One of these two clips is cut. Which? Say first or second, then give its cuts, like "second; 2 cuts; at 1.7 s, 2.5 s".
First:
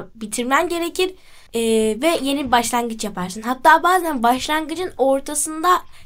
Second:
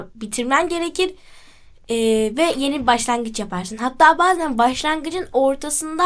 first; 1 cut; at 1.5 s